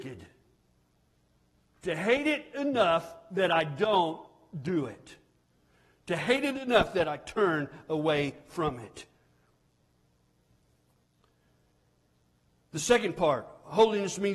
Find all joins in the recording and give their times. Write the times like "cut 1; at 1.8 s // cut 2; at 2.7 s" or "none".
none